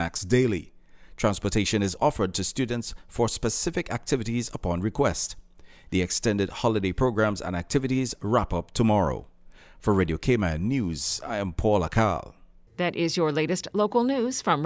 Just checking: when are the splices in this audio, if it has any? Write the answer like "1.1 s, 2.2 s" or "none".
2.0 s